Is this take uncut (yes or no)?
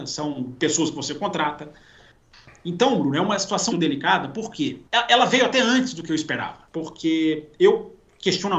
no